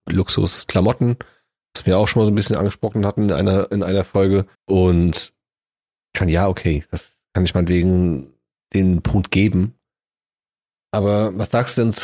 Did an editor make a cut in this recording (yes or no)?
yes